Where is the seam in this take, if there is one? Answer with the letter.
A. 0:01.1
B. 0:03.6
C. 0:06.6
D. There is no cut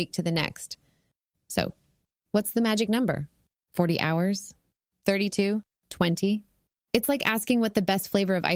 D